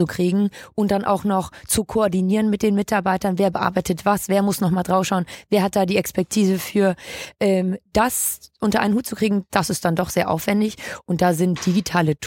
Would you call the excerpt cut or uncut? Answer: uncut